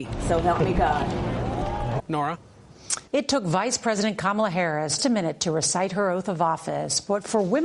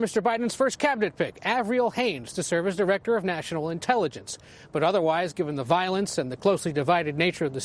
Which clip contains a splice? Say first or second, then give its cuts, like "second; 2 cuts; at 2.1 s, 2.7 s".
first; 3 cuts; at 2.0 s, 3.1 s, 5.0 s